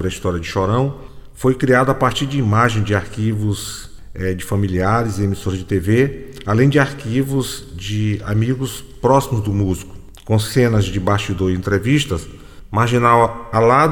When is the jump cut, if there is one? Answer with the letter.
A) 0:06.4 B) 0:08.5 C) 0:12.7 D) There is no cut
D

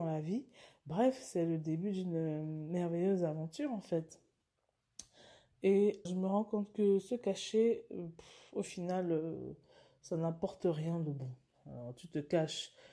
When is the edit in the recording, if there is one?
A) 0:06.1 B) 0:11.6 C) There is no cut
A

